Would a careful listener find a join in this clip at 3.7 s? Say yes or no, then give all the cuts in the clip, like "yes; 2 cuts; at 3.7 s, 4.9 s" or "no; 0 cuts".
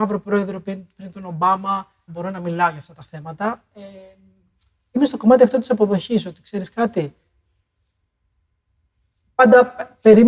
no; 1 cut; at 2.1 s